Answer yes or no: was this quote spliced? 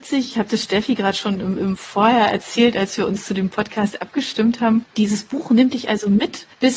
yes